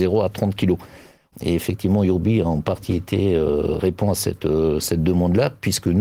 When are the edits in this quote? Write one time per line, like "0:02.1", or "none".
0:01.3